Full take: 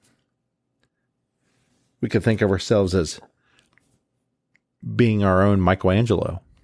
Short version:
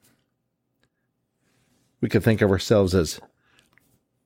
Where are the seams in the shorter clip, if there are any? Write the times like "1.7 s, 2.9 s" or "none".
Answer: none